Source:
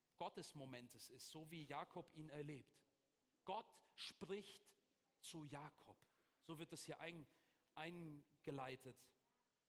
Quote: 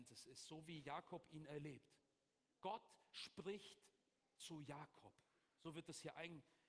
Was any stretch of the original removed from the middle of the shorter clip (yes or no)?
no